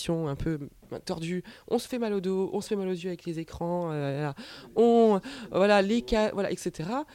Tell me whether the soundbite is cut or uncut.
uncut